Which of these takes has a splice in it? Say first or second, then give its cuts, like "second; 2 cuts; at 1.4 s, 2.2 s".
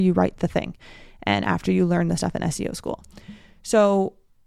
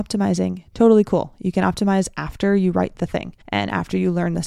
second; 1 cut; at 3.4 s